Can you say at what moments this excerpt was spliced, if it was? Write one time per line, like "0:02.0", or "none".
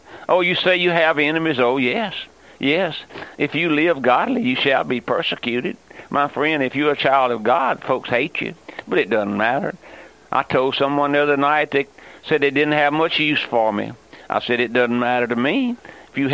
none